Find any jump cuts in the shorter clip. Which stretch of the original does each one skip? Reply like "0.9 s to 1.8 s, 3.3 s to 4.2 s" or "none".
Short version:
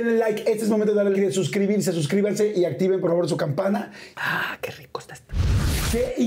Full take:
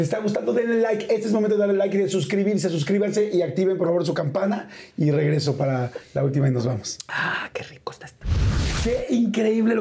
1.8 s to 1.9 s, 4.9 s to 7.1 s

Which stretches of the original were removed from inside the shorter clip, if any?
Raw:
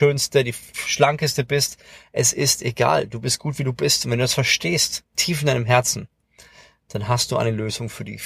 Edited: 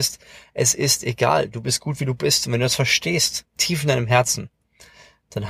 none

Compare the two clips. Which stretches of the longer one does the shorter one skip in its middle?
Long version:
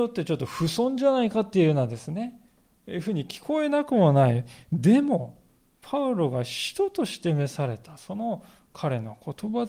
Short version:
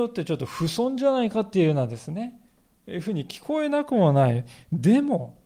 none

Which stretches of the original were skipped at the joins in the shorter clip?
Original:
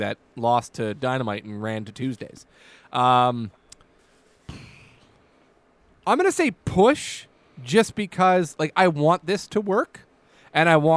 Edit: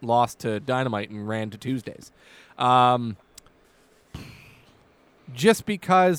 5.5 s to 7.5 s

